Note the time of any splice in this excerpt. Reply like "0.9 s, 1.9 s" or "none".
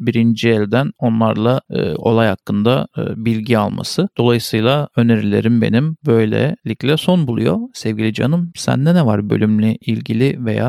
none